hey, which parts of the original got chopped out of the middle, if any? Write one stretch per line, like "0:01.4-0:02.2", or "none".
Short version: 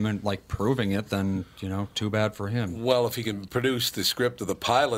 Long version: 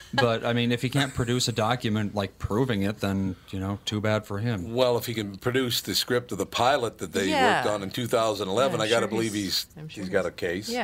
none

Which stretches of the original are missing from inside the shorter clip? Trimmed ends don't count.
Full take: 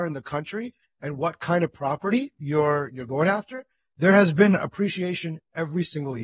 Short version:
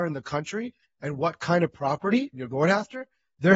0:02.3-0:02.9

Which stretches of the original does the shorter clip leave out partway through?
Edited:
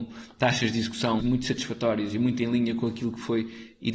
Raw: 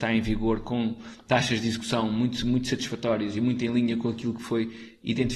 0:02.1-0:02.4

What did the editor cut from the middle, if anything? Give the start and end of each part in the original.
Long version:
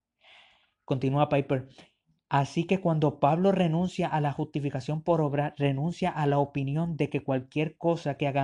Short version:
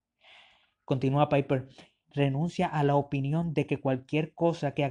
0:02.1-0:05.5

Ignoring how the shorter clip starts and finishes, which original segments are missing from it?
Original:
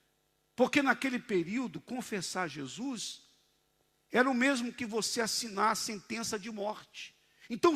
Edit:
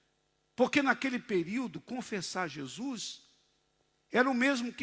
none

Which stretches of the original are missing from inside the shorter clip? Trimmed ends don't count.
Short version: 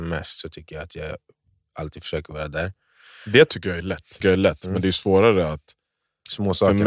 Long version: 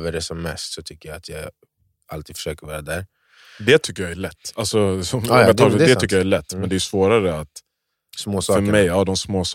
0:04.5-0:06.1

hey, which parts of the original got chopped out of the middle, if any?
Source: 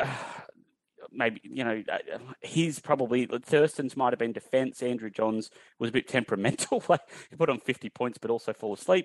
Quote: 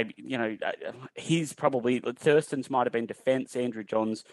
none

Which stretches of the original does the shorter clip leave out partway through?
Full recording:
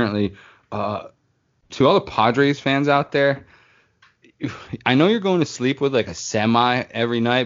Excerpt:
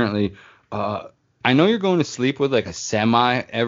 0:01.4-0:04.8

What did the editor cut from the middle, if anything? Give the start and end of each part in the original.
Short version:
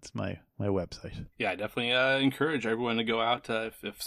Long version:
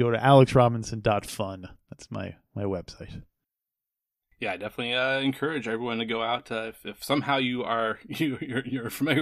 0:03.3-0:04.3

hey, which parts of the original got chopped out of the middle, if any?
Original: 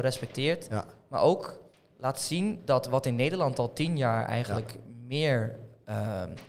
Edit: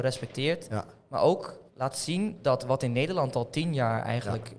0:01.7-0:01.9

